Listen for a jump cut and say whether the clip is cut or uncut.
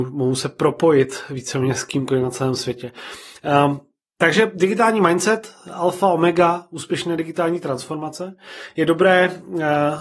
uncut